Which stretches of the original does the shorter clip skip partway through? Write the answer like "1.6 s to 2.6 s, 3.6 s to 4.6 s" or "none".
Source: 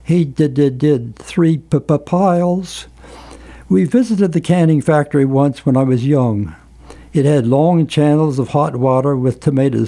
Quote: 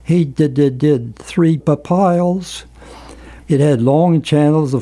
1.6 s to 1.8 s, 3.6 s to 7.0 s